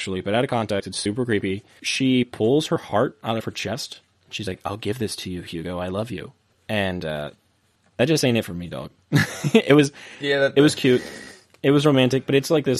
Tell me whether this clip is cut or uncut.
uncut